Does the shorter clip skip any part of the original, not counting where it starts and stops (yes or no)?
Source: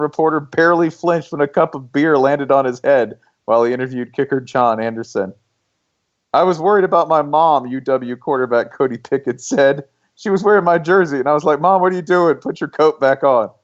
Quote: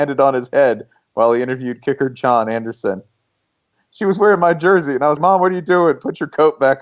yes